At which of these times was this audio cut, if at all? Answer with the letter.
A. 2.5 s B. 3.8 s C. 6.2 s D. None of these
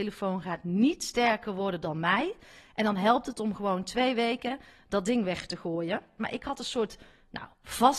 C